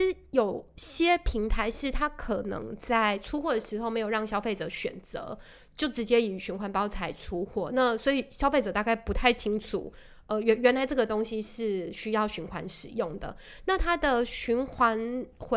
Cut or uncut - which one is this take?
uncut